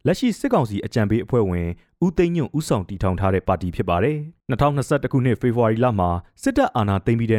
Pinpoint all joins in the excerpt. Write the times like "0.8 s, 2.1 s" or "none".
4.4 s